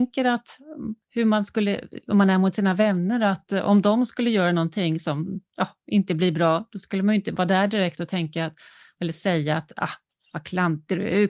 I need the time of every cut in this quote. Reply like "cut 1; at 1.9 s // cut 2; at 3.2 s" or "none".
cut 1; at 1.0 s